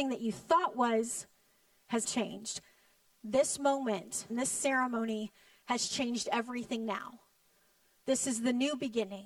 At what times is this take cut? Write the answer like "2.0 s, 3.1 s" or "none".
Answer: 2.0 s, 4.3 s